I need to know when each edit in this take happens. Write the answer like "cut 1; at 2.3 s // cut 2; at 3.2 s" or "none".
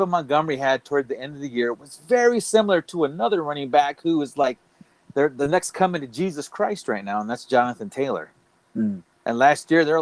none